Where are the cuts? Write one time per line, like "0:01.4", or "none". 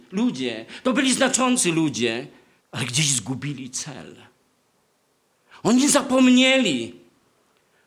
0:02.6